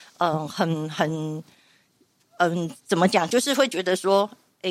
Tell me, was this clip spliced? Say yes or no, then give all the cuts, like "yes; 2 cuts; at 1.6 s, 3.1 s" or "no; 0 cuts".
no; 0 cuts